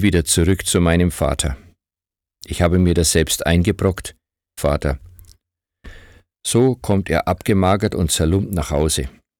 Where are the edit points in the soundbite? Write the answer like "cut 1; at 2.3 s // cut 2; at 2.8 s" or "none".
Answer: cut 1; at 4.6 s